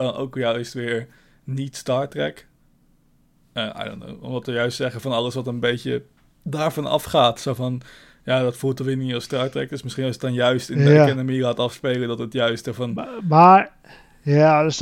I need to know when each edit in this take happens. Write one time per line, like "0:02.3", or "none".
none